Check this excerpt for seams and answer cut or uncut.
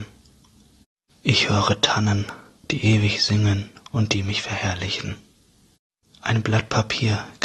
cut